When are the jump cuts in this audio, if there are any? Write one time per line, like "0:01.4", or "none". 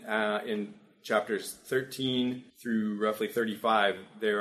0:02.5